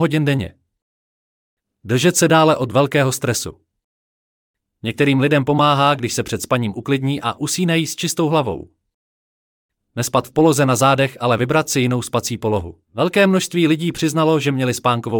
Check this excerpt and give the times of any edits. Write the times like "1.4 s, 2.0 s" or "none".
12.8 s